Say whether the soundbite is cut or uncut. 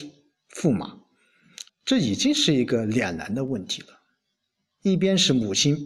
cut